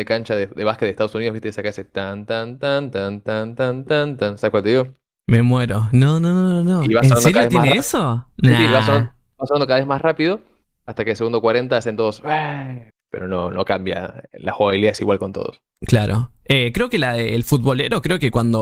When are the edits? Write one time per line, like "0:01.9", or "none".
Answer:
0:12.9